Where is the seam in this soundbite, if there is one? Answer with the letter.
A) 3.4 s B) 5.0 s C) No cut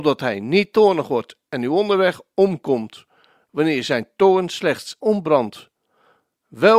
B